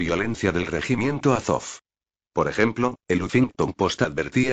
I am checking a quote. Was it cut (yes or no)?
no